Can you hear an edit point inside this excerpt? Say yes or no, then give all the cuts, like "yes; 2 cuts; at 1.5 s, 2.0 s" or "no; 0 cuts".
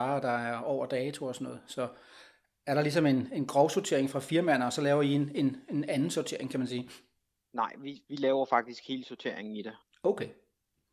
no; 0 cuts